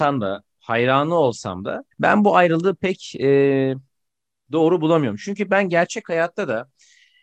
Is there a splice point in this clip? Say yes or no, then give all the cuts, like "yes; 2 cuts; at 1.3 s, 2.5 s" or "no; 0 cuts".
yes; 1 cut; at 1.9 s